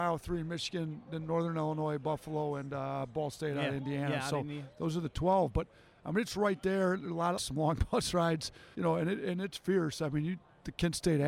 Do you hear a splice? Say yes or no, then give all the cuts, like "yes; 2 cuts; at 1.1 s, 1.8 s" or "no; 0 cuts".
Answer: yes; 2 cuts; at 7.4 s, 8.7 s